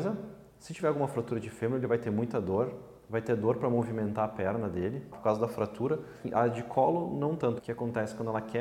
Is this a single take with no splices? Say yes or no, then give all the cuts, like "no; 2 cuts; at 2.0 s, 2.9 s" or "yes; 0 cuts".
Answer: no; 2 cuts; at 5.1 s, 7.6 s